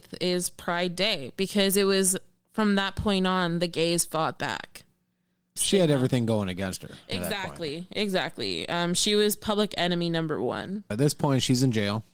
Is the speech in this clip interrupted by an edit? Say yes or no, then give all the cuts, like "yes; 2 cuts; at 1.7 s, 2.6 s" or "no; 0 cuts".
yes; 2 cuts; at 5.6 s, 10.9 s